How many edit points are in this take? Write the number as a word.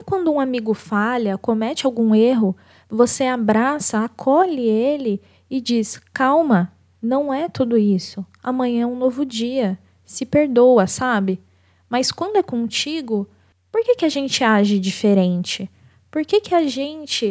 zero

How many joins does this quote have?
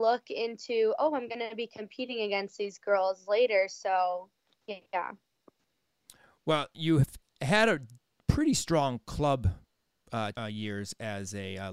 one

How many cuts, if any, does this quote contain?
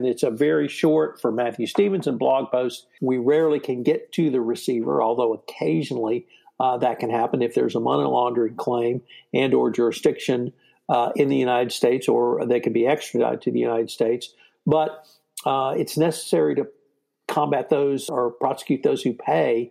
two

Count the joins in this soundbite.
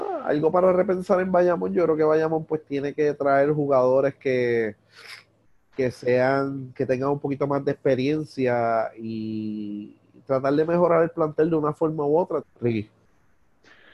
one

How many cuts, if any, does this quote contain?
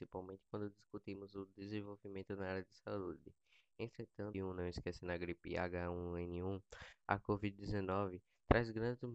one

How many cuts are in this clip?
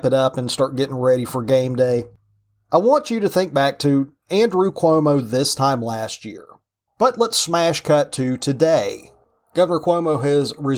one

